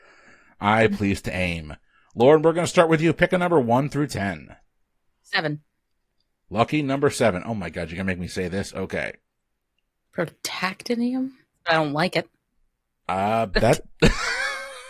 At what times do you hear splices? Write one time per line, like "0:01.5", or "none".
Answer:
0:10.0
0:11.5